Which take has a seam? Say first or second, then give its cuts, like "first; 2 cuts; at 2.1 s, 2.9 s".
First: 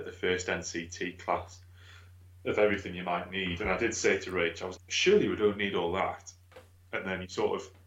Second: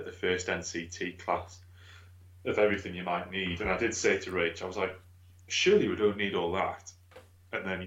first; 1 cut; at 4.7 s